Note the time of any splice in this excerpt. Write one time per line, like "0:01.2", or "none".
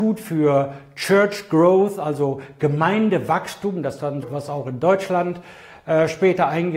0:04.2